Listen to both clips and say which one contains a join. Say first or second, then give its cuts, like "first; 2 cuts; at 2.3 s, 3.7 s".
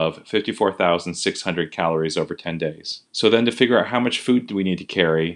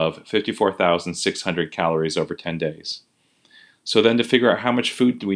first; 1 cut; at 3.1 s